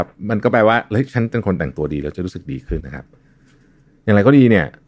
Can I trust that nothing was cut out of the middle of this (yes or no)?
no